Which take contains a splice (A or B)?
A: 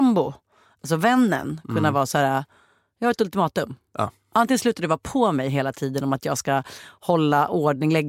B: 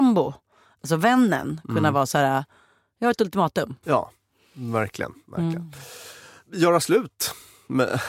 B